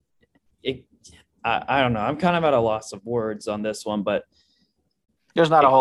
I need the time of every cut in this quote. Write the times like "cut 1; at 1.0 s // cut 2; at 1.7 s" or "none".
none